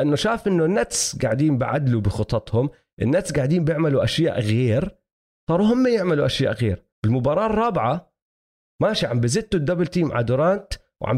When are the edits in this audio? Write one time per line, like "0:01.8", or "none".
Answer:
0:06.9